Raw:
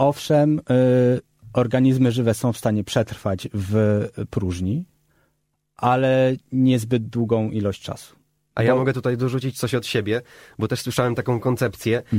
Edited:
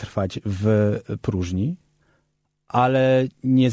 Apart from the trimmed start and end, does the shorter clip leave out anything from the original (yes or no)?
no